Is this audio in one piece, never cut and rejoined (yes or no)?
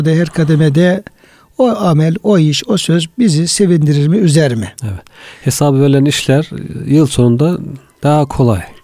yes